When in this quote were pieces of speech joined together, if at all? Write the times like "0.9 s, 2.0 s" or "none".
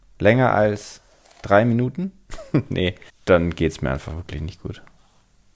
3.1 s